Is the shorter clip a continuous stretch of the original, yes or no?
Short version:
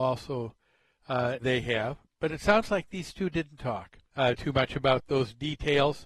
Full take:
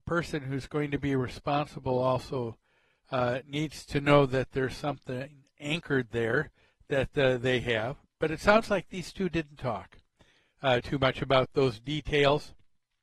no